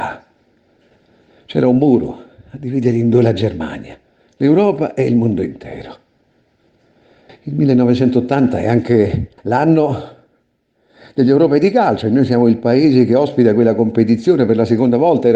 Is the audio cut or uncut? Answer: cut